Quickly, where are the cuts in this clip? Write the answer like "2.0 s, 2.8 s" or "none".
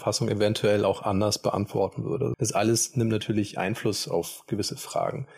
2.3 s